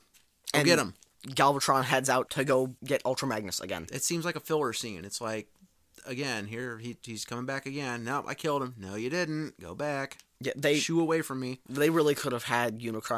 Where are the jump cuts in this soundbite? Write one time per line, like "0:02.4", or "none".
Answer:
none